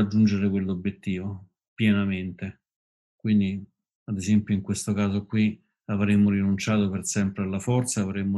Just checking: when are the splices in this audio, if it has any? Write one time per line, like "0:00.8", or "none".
none